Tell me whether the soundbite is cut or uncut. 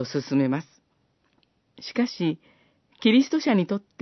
cut